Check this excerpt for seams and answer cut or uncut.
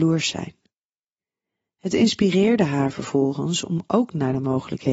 uncut